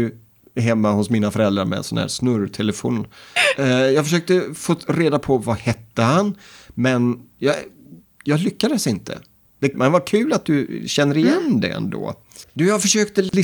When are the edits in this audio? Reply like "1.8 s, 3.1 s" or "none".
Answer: 3.4 s, 9.7 s, 12.4 s